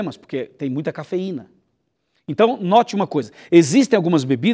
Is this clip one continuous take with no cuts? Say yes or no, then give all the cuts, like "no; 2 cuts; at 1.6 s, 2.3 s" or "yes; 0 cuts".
yes; 0 cuts